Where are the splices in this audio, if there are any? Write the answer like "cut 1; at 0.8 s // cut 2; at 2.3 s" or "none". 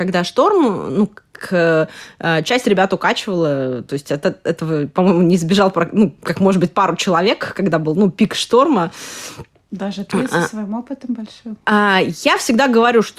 none